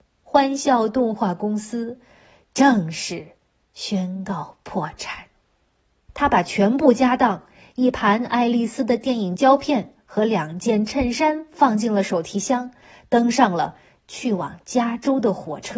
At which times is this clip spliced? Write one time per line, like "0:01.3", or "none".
0:06.1